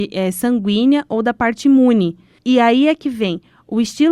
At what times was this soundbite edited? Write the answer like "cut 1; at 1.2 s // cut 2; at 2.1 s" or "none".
cut 1; at 2.4 s